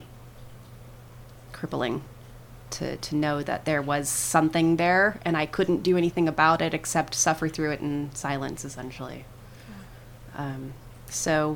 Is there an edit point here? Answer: yes; 1 cut; at 2.6 s

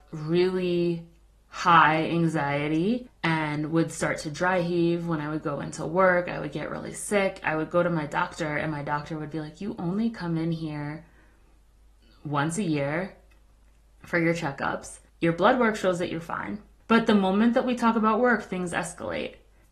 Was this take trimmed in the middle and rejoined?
yes; 1 cut; at 15.1 s

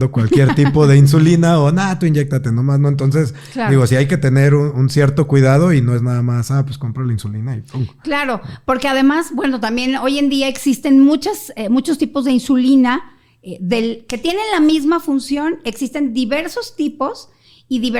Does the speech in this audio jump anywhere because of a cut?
no; 0 cuts

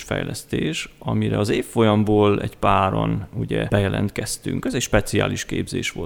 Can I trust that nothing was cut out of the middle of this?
yes; 0 cuts

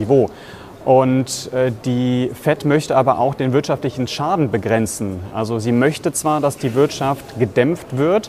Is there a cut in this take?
no; 0 cuts

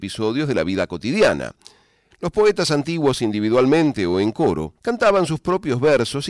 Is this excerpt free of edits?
no; 2 cuts; at 2.1 s, 4.8 s

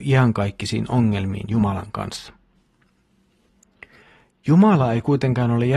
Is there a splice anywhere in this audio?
no; 0 cuts

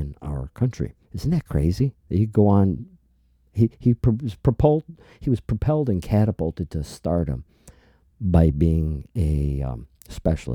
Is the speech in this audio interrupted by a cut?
yes; 1 cut; at 1.0 s

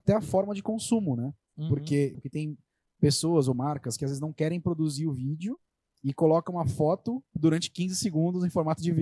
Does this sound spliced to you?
yes; 2 cuts; at 2.1 s, 7.3 s

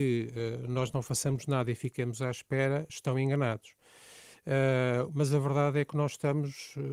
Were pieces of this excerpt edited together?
yes; 2 cuts; at 2.9 s, 5.1 s

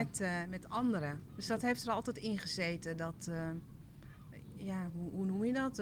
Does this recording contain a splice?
yes; 1 cut; at 1.3 s

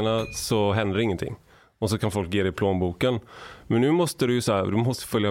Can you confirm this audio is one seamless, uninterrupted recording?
yes; 0 cuts

